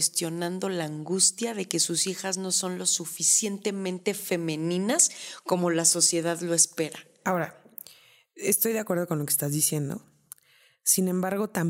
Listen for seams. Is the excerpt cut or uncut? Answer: uncut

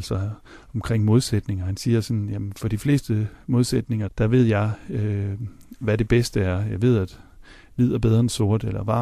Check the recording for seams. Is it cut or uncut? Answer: cut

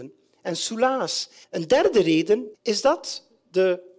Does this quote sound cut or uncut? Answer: cut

